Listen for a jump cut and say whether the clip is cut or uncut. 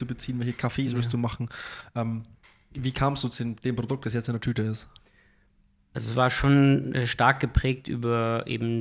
uncut